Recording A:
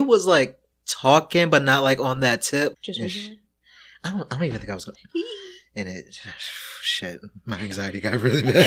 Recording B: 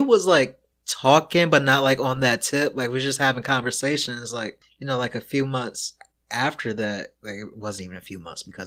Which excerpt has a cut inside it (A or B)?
A